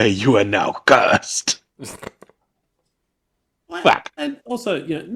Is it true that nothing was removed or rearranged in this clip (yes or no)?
yes